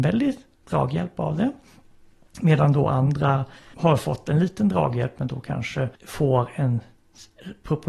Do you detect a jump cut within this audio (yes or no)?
yes